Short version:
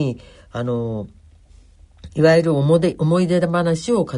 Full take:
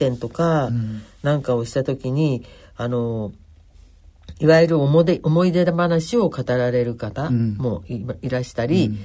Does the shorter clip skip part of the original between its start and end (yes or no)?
no